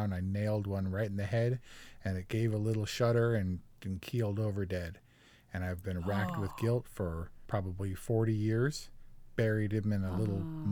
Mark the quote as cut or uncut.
uncut